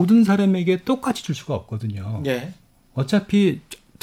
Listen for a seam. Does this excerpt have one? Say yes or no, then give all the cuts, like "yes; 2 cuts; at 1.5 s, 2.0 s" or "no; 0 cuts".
no; 0 cuts